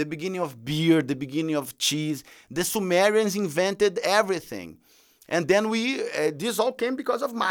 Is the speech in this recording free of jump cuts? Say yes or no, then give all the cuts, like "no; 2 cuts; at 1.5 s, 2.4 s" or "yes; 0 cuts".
yes; 0 cuts